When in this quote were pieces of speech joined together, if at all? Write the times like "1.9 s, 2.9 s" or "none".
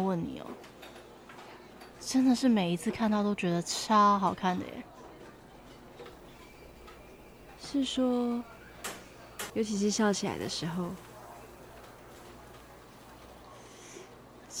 1.9 s, 9.5 s